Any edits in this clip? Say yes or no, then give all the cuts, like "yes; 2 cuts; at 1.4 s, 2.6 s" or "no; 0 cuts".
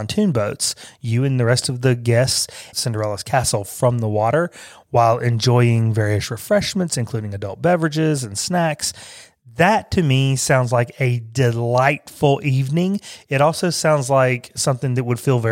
yes; 1 cut; at 2.7 s